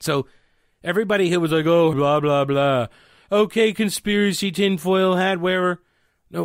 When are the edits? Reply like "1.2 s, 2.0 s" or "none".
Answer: 1.9 s